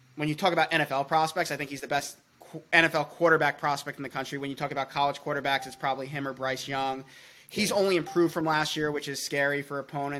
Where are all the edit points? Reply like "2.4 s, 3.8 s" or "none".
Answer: none